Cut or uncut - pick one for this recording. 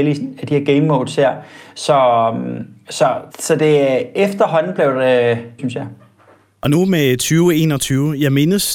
cut